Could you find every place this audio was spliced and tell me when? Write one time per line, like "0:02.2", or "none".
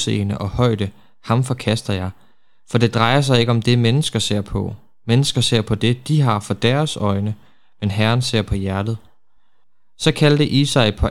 none